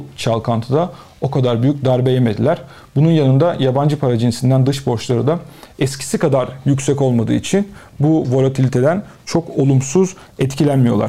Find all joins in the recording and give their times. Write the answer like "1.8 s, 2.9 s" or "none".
none